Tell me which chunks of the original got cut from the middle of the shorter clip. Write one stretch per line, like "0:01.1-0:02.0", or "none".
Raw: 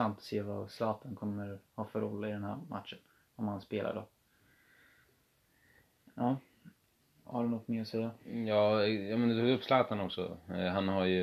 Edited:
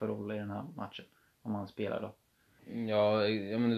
0:04.5-0:08.2